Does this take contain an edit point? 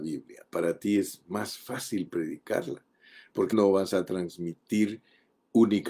yes; 1 cut; at 3.5 s

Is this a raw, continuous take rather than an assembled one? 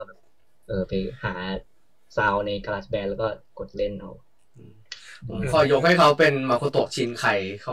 yes; 0 cuts

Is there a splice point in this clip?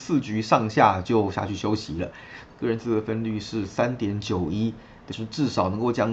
yes; 2 cuts; at 2.5 s, 5.1 s

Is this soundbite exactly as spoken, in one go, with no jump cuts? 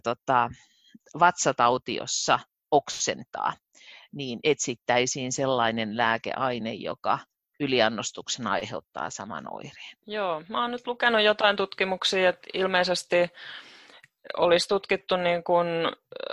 no; 1 cut; at 10.0 s

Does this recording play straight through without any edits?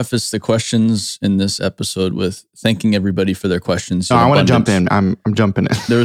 no; 1 cut; at 4.1 s

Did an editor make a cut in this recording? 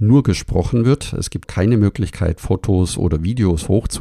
yes; 1 cut; at 1.4 s

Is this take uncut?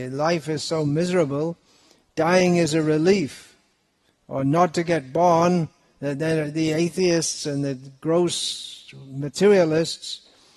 yes; 0 cuts

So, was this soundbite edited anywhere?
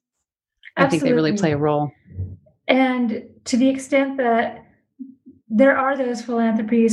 no; 0 cuts

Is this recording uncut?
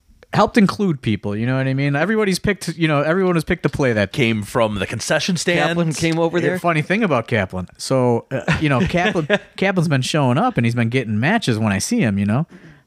no; 1 cut; at 4.1 s

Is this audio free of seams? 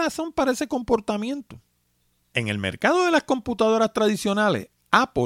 yes; 0 cuts

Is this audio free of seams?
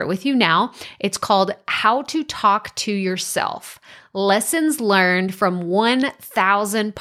yes; 0 cuts

